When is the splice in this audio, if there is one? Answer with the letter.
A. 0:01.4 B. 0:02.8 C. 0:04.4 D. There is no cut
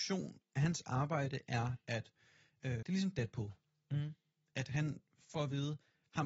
B